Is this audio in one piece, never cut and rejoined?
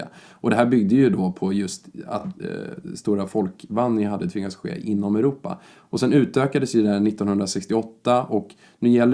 yes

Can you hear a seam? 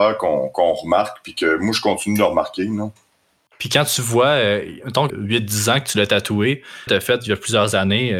yes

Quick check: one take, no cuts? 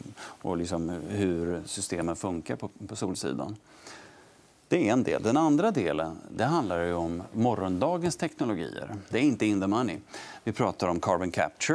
no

